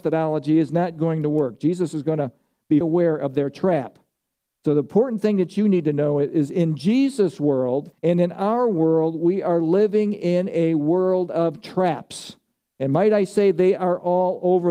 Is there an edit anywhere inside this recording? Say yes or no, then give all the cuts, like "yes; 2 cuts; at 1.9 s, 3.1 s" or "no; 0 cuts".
yes; 2 cuts; at 2.8 s, 7.9 s